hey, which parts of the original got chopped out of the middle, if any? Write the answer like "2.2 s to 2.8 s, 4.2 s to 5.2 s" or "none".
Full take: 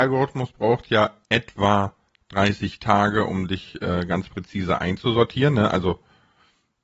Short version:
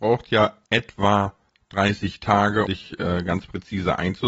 3.3 s to 3.5 s

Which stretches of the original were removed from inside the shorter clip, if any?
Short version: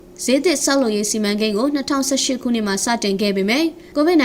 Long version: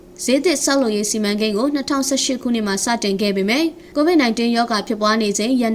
none

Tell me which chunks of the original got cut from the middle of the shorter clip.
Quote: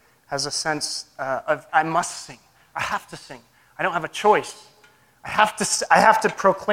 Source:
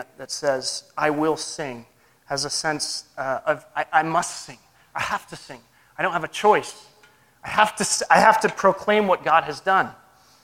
3.7 s to 3.9 s

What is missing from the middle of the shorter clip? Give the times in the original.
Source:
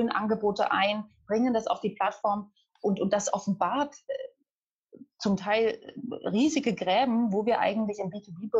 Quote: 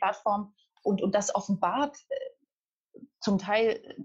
none

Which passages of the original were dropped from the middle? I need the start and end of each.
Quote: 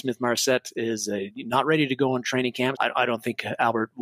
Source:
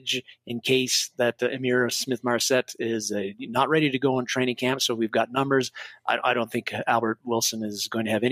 4.8 s to 6.0 s

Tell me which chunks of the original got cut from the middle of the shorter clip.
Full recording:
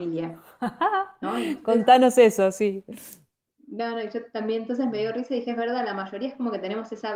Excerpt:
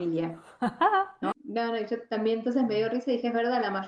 1.3 s to 3.5 s

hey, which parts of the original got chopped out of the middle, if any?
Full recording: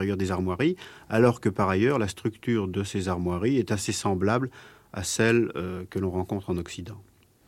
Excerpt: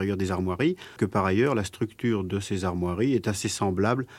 1.0 s to 1.4 s

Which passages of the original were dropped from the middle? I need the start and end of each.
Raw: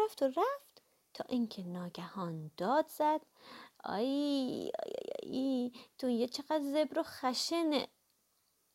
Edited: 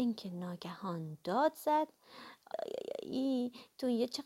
3.9 s to 4.7 s

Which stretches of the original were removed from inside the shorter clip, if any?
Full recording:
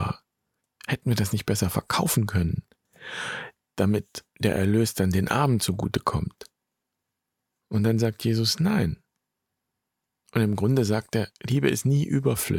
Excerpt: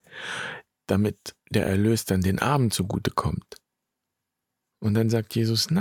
none

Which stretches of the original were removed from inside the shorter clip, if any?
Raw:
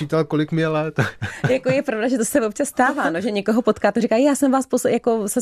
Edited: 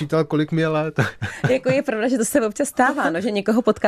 none

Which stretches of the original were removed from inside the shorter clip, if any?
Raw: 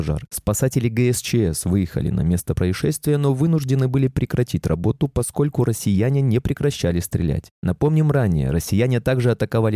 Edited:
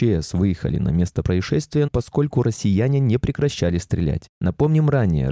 3.2 s to 5.1 s

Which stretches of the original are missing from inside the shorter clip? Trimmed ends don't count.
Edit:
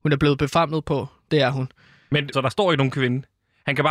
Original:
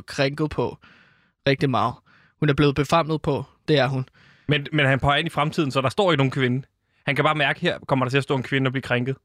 4.7 s to 5.7 s

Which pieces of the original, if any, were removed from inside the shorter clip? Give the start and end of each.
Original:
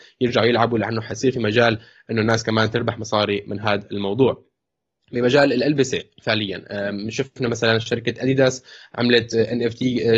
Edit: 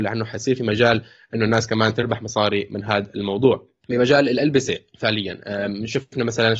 4.6 s to 5.1 s

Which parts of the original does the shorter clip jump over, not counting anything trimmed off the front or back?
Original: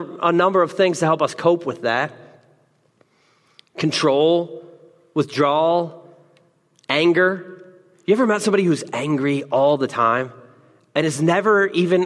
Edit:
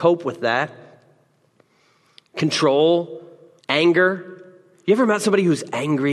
5.0 s to 6.8 s

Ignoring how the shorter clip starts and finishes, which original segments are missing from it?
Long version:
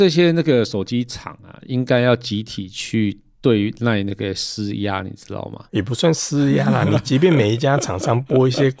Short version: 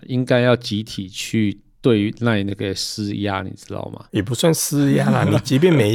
none

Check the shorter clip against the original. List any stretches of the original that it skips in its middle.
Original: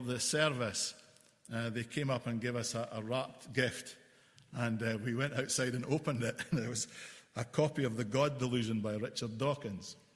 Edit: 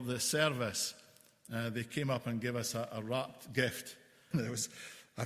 4.3 s to 6.5 s

